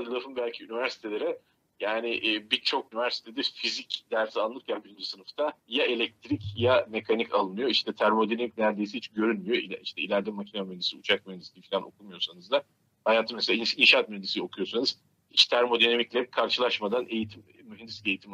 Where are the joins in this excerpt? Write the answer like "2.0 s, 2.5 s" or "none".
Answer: 5.6 s